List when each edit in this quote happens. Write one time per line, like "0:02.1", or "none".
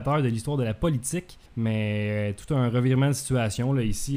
0:01.5